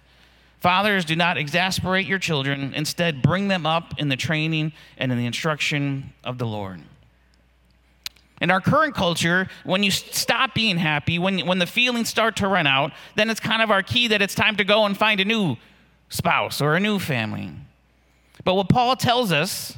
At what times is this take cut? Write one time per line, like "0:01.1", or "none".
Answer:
0:08.2